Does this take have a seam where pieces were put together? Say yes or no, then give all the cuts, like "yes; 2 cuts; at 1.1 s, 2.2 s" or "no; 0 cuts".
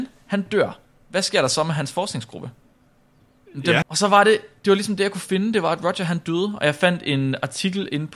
yes; 1 cut; at 3.8 s